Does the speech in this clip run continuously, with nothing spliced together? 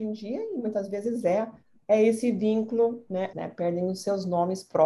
no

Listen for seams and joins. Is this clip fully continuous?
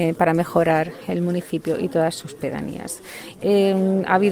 no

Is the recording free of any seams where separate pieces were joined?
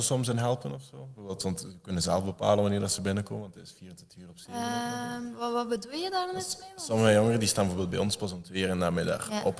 yes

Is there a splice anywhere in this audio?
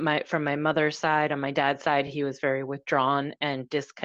no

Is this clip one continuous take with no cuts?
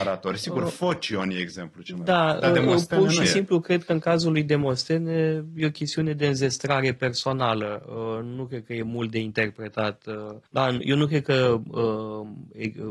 no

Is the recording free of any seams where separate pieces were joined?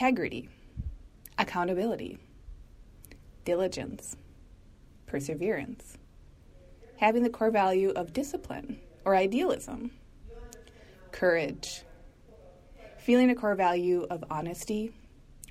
yes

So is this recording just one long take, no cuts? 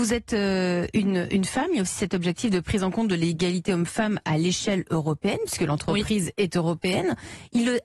yes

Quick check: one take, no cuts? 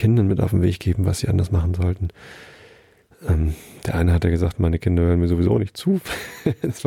yes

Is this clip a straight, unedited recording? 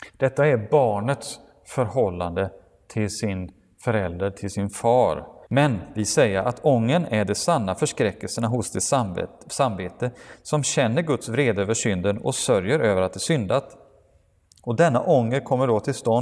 no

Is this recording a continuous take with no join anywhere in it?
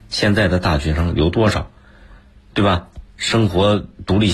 yes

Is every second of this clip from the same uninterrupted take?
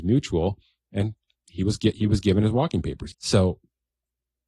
no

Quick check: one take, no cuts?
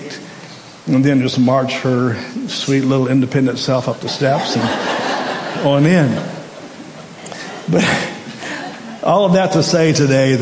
yes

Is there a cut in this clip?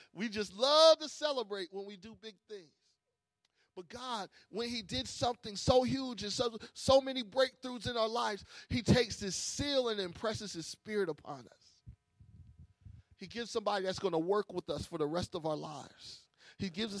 no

